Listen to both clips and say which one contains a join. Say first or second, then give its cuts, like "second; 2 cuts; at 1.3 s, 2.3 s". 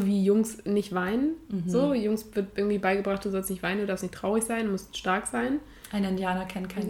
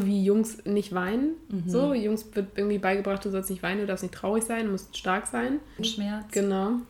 second; 1 cut; at 5.8 s